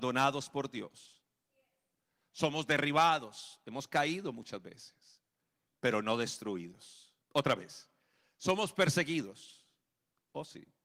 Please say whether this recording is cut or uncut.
cut